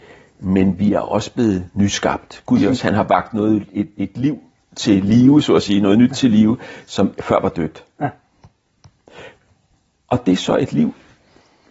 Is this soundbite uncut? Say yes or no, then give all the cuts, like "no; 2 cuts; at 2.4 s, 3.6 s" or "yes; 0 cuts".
no; 1 cut; at 2.6 s